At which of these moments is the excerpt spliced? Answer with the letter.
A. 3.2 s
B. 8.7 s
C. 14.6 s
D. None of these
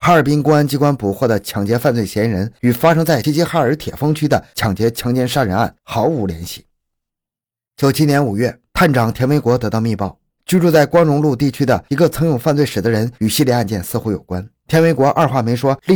A